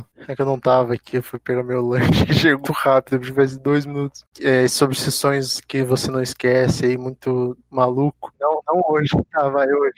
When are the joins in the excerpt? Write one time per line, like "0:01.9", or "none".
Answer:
0:02.6
0:08.3